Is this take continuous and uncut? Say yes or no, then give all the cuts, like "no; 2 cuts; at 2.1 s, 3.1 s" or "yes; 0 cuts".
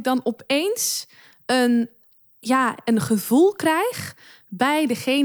yes; 0 cuts